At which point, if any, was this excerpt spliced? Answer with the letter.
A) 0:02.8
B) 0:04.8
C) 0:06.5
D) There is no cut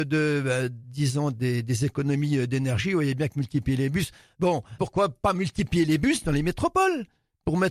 B